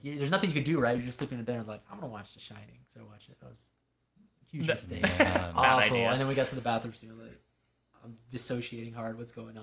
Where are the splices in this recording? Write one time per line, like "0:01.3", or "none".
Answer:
none